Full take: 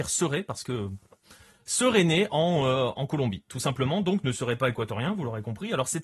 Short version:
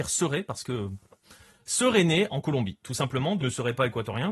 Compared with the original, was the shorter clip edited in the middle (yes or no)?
yes